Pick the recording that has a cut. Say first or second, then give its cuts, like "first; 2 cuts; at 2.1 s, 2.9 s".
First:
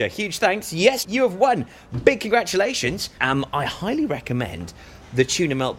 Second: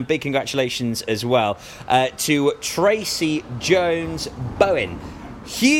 first; 2 cuts; at 1.0 s, 3.2 s